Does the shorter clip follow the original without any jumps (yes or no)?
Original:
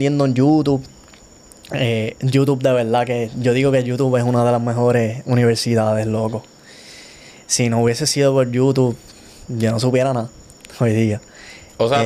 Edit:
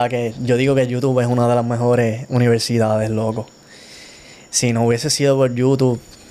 yes